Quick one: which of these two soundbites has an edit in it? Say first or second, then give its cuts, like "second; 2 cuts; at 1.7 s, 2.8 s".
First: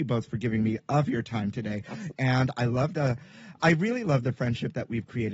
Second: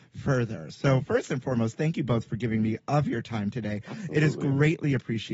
first; 1 cut; at 2.1 s